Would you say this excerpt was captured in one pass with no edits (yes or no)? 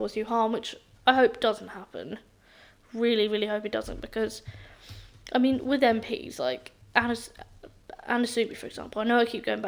yes